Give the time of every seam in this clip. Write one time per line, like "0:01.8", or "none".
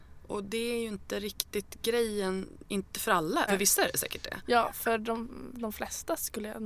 0:03.5

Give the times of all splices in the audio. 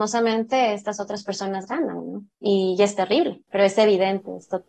0:02.3
0:03.5

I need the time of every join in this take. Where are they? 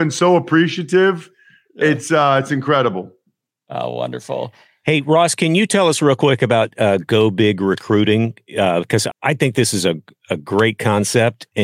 0:09.1

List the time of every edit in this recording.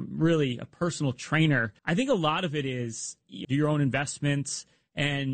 0:01.8
0:03.4

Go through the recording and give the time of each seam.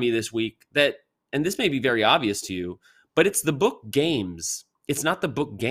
0:04.8

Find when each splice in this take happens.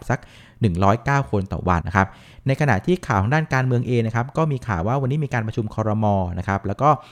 0:01.8

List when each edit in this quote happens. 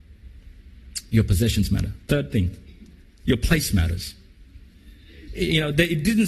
0:05.3

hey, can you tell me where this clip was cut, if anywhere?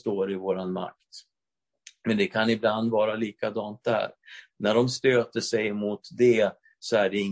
0:04.5

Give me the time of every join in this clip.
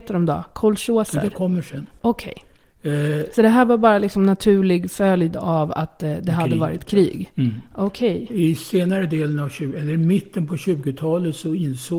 none

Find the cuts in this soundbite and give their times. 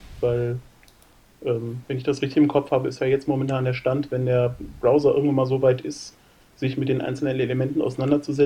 none

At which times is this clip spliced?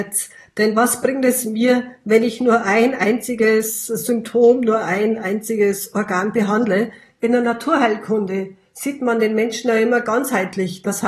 none

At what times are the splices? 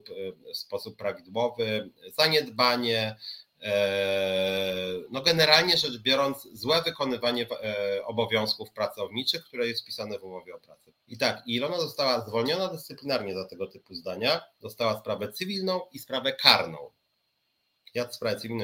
0:10.9

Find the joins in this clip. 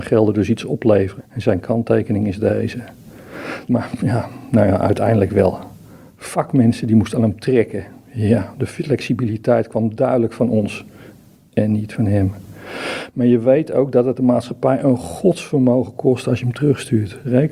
0:01.2
0:03.7

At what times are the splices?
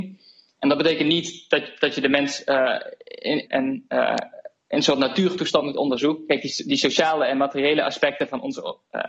0:03.5

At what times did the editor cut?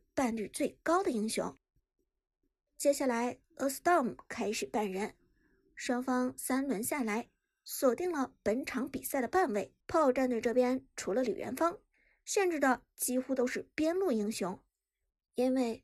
0:09.8

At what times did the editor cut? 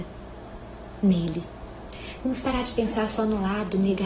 0:02.2

